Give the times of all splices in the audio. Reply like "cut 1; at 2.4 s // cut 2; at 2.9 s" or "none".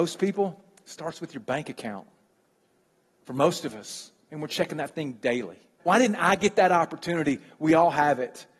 cut 1; at 5.8 s